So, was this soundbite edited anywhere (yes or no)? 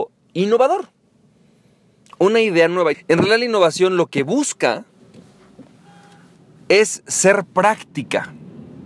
yes